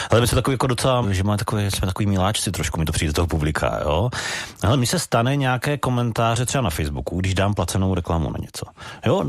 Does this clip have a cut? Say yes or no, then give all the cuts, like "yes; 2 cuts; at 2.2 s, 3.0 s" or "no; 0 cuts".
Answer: yes; 1 cut; at 1.0 s